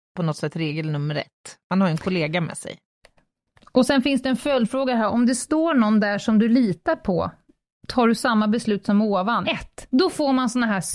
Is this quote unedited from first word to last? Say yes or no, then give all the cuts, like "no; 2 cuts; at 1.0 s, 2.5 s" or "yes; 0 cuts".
no; 1 cut; at 9.4 s